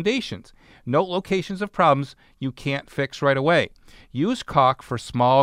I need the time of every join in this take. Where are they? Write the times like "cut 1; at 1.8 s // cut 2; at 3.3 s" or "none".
none